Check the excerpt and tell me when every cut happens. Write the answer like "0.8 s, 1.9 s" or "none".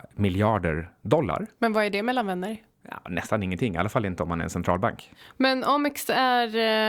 none